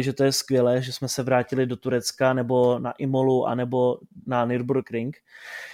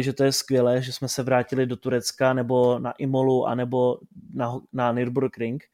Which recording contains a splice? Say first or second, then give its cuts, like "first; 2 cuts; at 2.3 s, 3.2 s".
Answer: first; 1 cut; at 4.2 s